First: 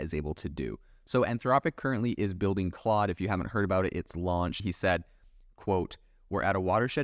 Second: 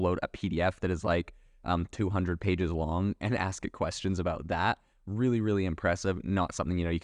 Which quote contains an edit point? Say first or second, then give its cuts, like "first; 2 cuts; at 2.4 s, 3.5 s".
first; 1 cut; at 4.6 s